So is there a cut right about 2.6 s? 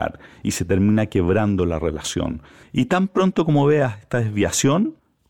yes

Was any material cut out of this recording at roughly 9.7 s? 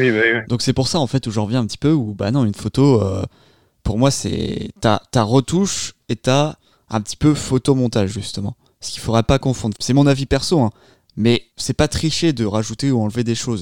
yes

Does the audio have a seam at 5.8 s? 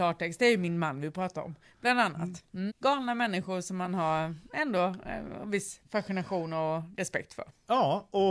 yes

